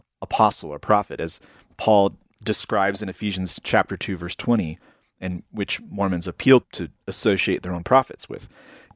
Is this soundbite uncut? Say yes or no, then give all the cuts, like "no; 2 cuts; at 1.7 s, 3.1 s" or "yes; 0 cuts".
no; 1 cut; at 6.6 s